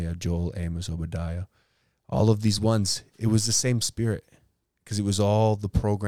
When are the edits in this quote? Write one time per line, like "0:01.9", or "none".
none